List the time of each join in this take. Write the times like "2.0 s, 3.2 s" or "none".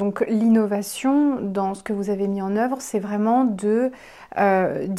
none